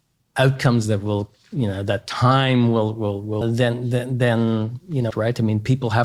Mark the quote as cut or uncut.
cut